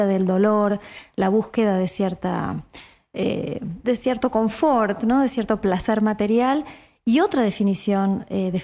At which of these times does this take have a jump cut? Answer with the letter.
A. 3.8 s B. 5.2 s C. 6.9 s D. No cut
A